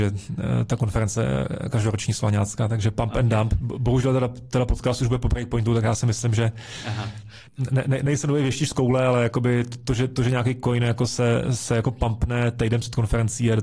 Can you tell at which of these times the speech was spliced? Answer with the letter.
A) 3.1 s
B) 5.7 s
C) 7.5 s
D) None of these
C